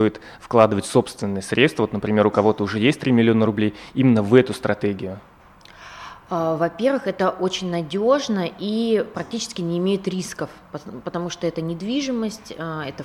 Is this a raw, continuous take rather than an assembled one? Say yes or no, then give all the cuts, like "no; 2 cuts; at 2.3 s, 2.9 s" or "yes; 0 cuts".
yes; 0 cuts